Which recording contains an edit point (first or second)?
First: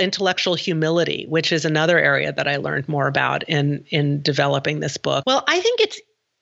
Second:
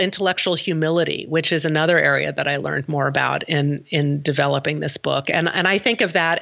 first